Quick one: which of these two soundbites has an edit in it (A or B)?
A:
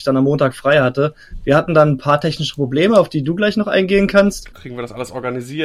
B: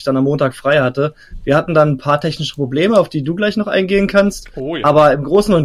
A